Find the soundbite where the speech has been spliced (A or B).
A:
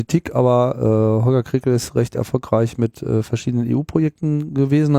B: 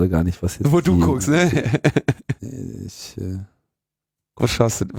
B